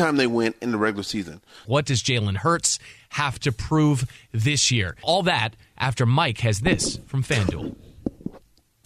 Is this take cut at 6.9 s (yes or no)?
no